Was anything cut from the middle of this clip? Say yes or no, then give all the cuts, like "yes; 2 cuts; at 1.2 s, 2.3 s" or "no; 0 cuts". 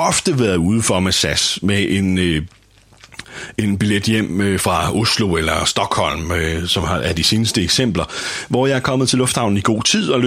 no; 0 cuts